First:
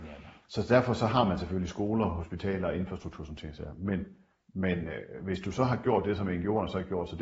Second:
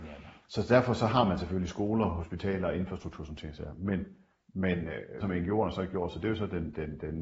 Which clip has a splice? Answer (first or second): second